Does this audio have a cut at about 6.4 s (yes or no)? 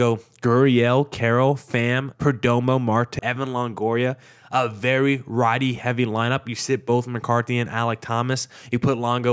no